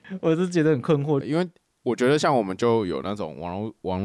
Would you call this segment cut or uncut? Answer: cut